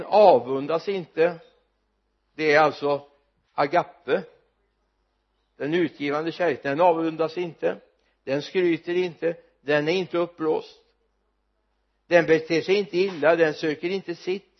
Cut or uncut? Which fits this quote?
uncut